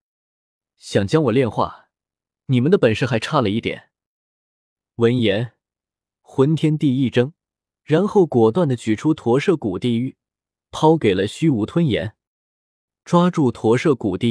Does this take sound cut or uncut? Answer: cut